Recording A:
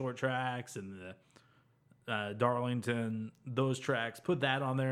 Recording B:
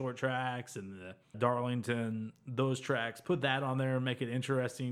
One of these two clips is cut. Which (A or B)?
B